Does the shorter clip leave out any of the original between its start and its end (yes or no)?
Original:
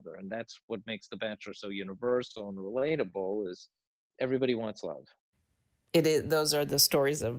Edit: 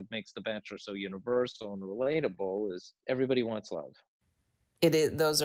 yes